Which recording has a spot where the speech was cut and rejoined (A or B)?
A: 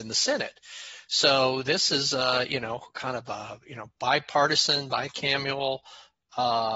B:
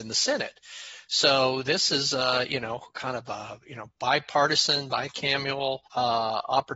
B